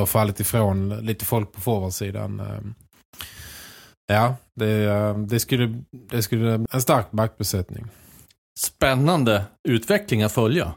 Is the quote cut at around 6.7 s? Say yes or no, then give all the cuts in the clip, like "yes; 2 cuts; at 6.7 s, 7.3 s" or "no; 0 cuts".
yes; 1 cut; at 6.7 s